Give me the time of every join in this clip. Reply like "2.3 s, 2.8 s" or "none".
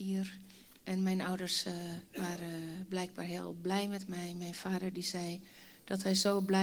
2.1 s